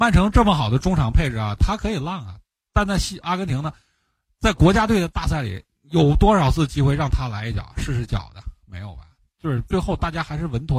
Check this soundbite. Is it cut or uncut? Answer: uncut